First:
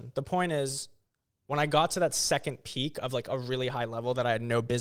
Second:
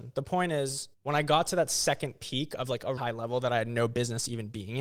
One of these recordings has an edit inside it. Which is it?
second; 2 cuts; at 0.9 s, 3.0 s

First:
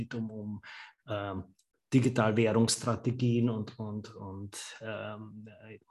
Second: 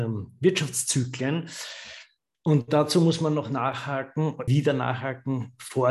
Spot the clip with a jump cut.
second; 2 cuts; at 2.3 s, 4.5 s

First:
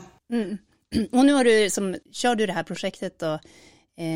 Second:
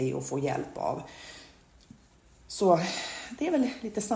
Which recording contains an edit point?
first; 1 cut; at 2.0 s

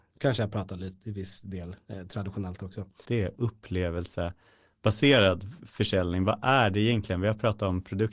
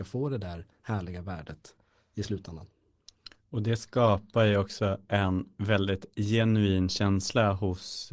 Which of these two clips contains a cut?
first; 1 cut; at 3.1 s

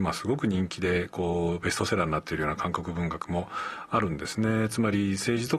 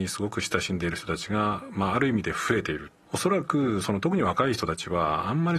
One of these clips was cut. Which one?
second; 1 cut; at 3.1 s

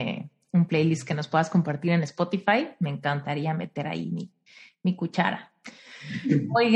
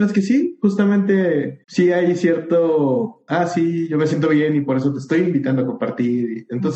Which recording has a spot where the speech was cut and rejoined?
second; 1 cut; at 1.6 s

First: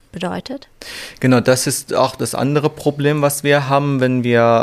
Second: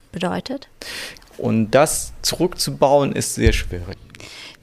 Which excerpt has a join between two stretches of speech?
second; 1 cut; at 1.2 s

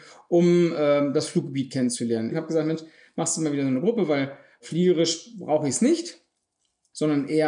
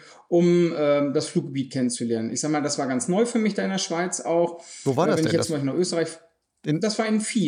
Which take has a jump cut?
first; 1 cut; at 2.3 s

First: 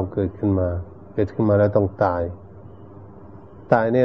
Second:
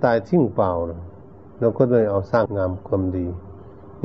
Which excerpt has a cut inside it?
second; 1 cut; at 2.5 s

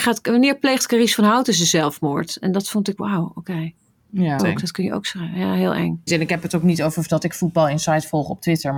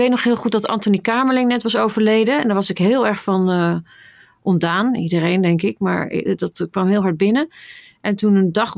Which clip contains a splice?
first; 3 cuts; at 3.0 s, 4.4 s, 6.1 s

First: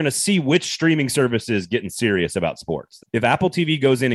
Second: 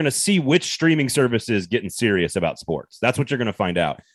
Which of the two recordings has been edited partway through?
first; 1 cut; at 3.0 s

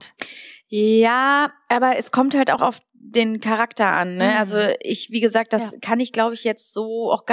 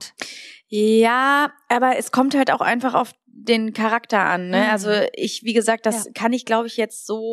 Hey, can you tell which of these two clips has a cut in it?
first; 1 cut; at 2.6 s

